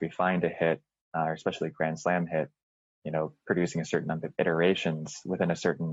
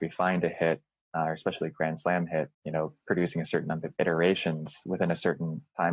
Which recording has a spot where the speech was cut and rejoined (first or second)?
second